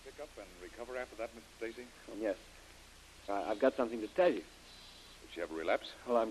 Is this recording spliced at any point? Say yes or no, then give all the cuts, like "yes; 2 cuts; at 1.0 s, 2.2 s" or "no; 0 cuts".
yes; 3 cuts; at 2.1 s, 3.3 s, 5.2 s